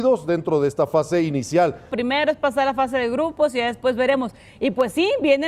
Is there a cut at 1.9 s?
yes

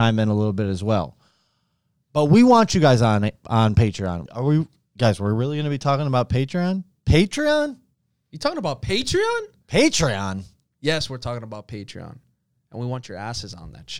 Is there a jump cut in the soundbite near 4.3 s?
yes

